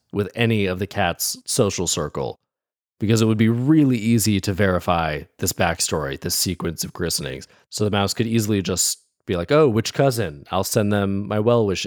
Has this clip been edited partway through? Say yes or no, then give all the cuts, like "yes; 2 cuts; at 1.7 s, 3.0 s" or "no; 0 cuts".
yes; 1 cut; at 7.6 s